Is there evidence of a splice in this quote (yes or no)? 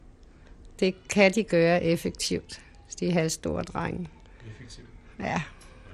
no